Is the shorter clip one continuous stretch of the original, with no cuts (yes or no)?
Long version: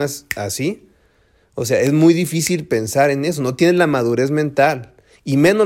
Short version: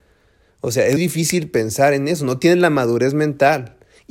no